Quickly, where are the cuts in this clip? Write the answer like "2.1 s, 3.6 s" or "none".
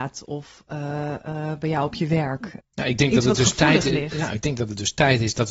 2.6 s